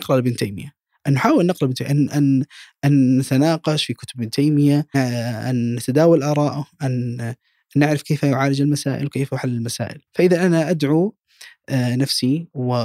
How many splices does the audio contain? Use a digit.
2